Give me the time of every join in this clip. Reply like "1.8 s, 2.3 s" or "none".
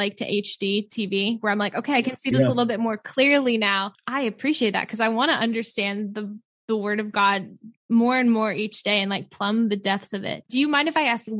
none